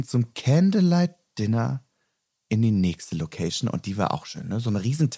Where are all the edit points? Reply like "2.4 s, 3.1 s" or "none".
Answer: none